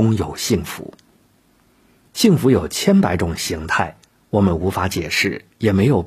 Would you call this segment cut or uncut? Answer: uncut